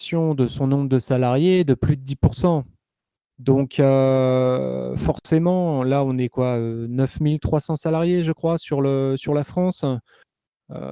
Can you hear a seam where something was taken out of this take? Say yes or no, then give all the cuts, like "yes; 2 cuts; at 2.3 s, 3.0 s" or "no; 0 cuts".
no; 0 cuts